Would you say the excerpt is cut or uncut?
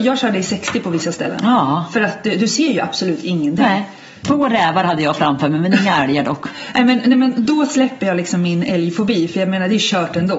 cut